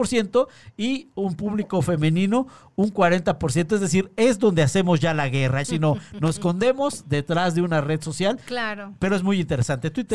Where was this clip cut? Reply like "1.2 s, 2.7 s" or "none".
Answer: 5.6 s